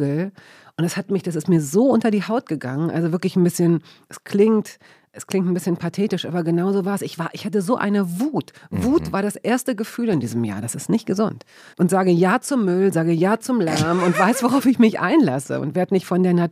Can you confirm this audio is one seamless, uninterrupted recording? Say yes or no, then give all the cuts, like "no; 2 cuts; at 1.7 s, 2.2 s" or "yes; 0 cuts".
no; 1 cut; at 11.7 s